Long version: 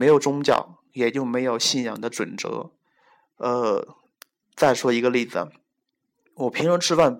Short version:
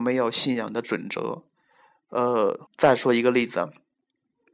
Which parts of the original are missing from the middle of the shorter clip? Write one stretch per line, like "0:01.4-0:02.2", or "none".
0:03.9-0:04.4